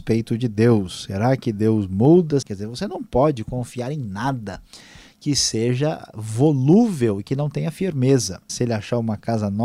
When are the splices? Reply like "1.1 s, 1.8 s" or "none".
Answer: 2.4 s, 8.5 s